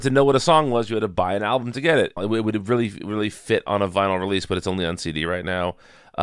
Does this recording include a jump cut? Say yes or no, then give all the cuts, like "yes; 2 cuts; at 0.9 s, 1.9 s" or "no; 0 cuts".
yes; 1 cut; at 2.2 s